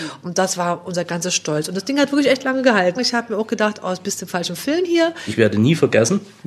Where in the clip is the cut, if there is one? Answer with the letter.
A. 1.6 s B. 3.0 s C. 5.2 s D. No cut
B